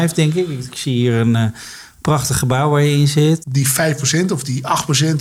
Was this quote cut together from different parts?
yes; 1 cut; at 3.4 s

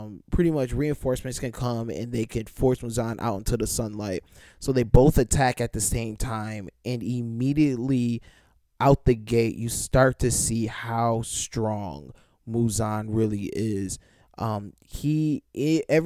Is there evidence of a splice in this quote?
no; 0 cuts

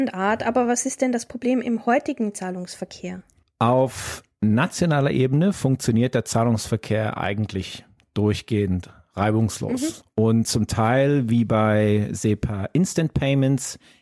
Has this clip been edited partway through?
no; 0 cuts

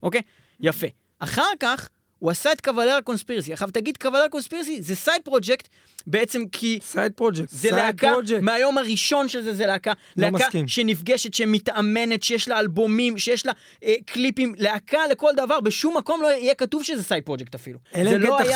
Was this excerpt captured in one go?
no; 1 cut; at 7.5 s

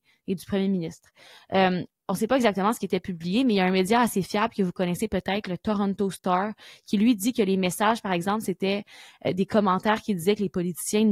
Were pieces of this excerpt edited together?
no; 0 cuts

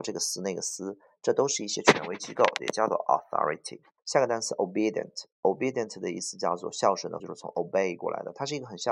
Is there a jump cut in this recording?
yes; 2 cuts; at 4.0 s, 7.2 s

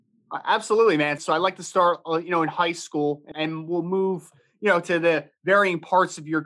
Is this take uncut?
no; 2 cuts; at 1.2 s, 3.3 s

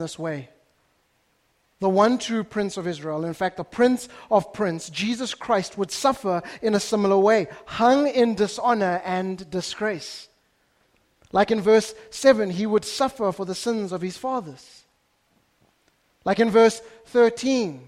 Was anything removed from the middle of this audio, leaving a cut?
no; 0 cuts

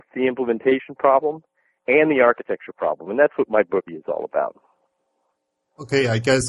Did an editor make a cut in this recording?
yes; 1 cut; at 3.9 s

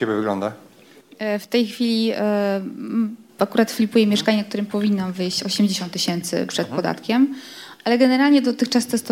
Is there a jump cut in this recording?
no; 0 cuts

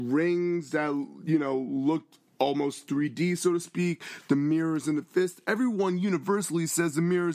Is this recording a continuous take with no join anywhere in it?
yes; 0 cuts

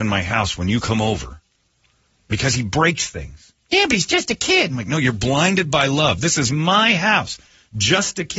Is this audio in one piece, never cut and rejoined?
yes; 0 cuts

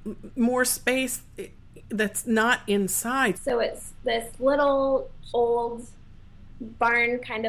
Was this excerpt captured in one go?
no; 2 cuts; at 3.3 s, 5.3 s

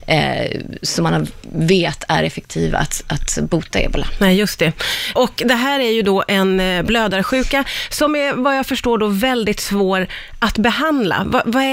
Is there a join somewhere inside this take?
no; 0 cuts

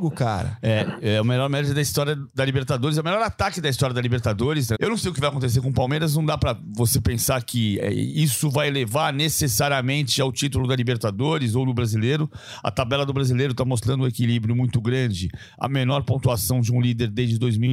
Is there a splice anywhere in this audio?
yes; 1 cut; at 4.7 s

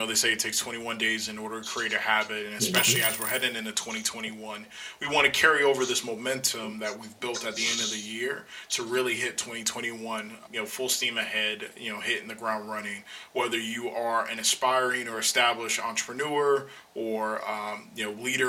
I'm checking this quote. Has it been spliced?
yes; 1 cut; at 10.5 s

